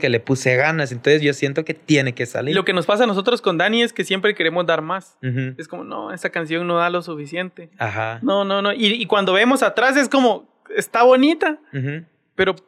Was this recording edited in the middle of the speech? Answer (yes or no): no